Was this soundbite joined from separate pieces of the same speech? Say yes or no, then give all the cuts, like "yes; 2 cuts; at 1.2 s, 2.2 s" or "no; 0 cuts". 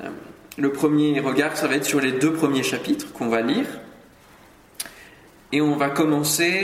no; 0 cuts